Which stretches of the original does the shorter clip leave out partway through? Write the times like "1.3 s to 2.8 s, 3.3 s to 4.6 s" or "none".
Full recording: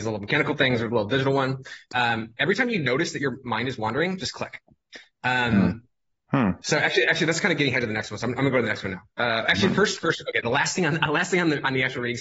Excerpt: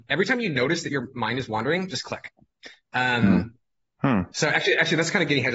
none